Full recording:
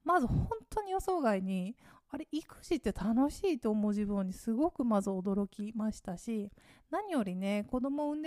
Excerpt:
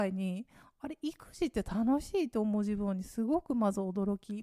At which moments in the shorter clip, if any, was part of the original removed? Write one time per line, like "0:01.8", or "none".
none